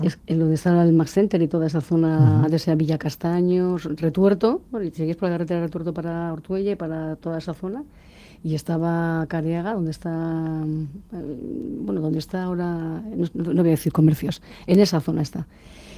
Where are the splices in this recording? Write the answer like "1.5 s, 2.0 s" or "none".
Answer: none